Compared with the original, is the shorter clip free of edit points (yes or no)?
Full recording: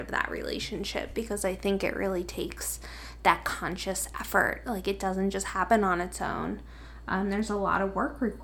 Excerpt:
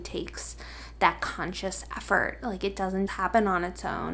no